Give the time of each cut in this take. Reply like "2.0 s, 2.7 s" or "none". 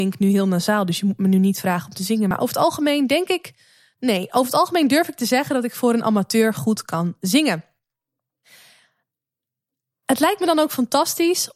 none